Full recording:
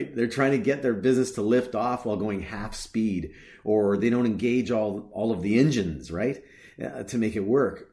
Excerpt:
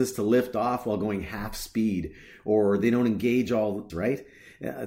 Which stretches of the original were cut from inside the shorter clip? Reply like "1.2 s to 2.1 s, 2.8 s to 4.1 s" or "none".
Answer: 5.1 s to 6.1 s